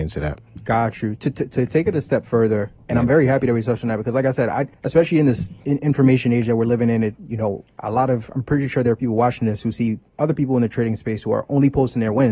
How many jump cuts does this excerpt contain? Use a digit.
1